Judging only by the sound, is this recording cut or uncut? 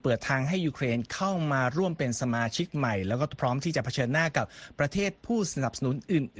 uncut